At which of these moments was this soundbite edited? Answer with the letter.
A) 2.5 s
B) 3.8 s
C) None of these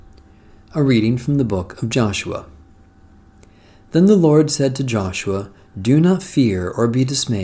C